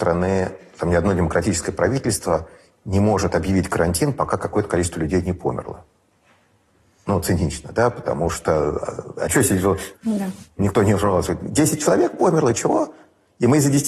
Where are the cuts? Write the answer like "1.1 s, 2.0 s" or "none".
9.9 s

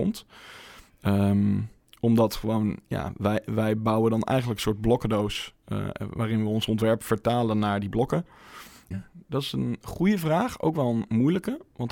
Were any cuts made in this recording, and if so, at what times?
8.9 s

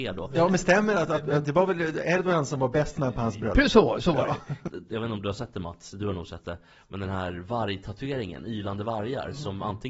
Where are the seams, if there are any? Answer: 4.7 s

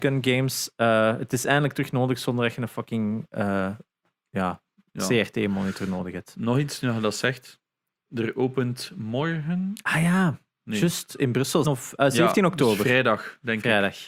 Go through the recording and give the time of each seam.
11.6 s

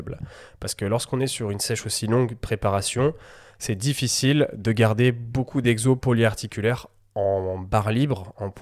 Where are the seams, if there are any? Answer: none

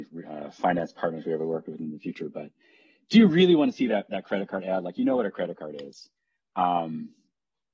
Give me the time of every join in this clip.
none

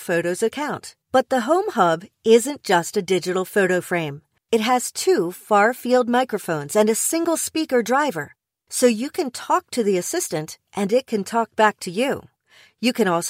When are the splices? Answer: 1.0 s, 4.4 s

